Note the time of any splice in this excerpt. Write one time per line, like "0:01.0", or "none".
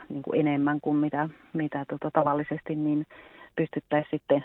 none